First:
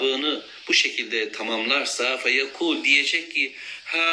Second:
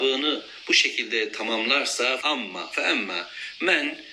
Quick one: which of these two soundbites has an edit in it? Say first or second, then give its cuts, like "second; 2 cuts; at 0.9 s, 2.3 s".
second; 1 cut; at 2.2 s